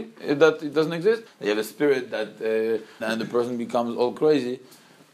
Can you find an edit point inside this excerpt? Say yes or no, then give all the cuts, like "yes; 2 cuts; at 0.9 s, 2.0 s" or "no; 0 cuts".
yes; 2 cuts; at 1.3 s, 3.0 s